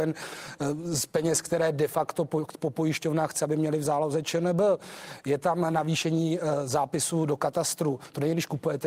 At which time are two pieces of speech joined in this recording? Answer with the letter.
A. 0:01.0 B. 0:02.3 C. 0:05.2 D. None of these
D